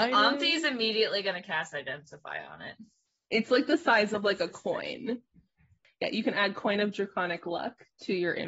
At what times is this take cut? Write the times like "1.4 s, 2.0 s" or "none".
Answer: none